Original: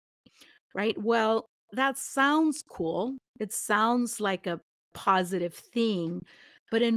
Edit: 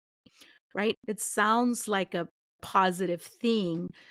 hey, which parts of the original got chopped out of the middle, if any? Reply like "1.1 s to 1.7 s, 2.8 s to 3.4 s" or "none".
0.9 s to 3.3 s